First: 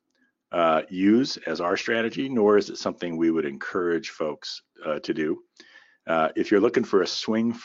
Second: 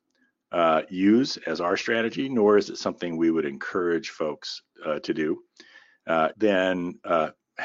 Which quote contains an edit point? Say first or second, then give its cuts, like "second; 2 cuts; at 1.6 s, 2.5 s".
second; 1 cut; at 6.3 s